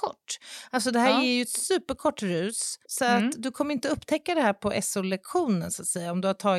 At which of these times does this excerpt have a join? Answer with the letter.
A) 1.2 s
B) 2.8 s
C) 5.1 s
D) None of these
B